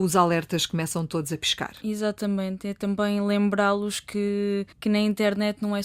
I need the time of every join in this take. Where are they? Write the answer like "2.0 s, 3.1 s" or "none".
4.7 s